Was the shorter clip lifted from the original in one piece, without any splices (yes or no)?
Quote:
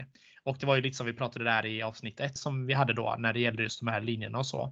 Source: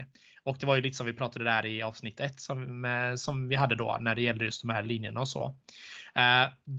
no